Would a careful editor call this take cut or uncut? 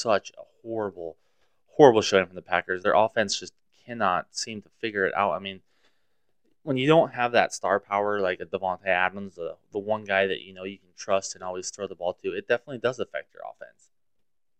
uncut